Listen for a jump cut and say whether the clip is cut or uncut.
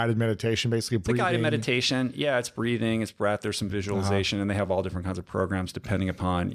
uncut